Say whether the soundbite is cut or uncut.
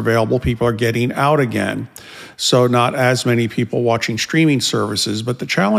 uncut